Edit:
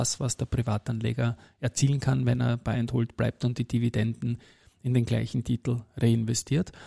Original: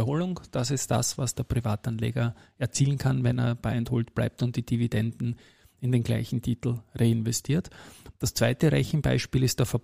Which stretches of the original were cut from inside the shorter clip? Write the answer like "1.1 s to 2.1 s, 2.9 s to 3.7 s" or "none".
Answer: none

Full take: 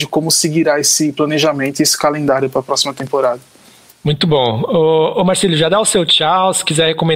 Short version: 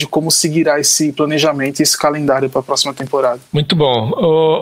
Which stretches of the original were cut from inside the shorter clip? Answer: 3.4 s to 4.0 s

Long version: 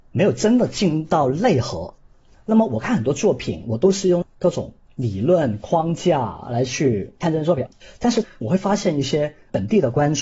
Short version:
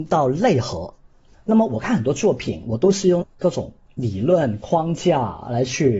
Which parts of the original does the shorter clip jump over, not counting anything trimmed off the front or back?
none

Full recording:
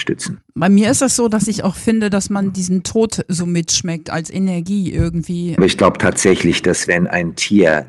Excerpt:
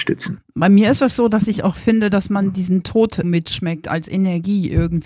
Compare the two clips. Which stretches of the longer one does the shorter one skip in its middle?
3.2 s to 3.5 s

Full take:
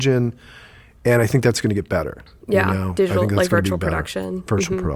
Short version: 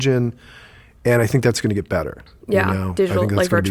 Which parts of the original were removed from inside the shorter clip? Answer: none

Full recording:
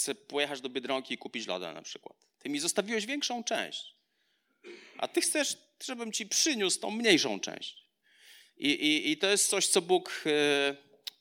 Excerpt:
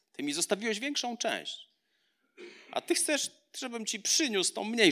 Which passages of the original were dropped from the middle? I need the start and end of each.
none

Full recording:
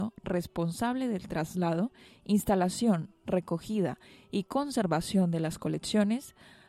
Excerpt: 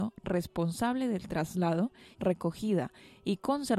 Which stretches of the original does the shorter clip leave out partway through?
2.1 s to 3.2 s

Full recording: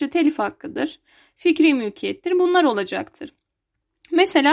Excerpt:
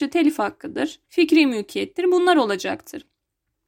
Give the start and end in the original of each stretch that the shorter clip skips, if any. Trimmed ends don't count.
1.0 s to 1.3 s

